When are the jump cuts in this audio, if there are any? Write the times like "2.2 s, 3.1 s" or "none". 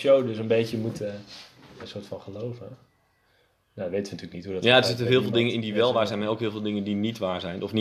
1.8 s